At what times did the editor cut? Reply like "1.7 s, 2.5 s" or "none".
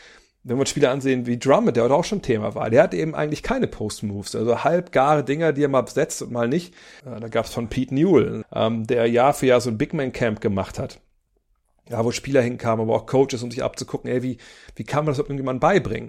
7.0 s, 8.4 s